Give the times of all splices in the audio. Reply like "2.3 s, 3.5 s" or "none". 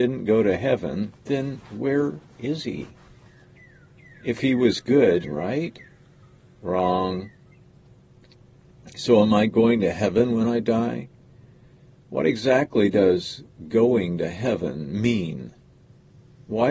5.2 s